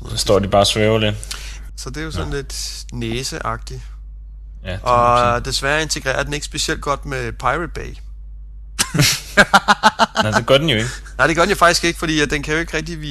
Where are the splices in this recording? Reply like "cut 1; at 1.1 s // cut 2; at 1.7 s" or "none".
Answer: cut 1; at 1.7 s